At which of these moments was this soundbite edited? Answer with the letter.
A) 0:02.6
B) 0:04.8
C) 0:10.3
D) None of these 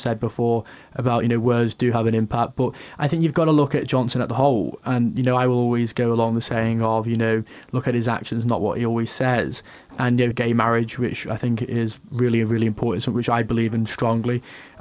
C